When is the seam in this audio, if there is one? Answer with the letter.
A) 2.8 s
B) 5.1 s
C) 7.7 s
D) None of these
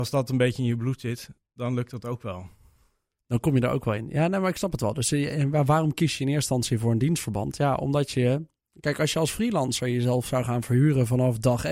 D